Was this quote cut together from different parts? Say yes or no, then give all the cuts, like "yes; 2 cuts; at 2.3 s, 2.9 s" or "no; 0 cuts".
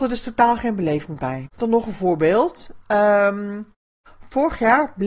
yes; 1 cut; at 1.5 s